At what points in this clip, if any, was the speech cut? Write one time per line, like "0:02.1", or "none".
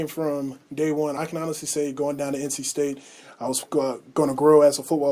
none